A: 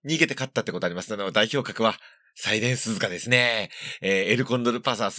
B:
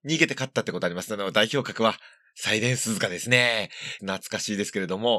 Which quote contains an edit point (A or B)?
B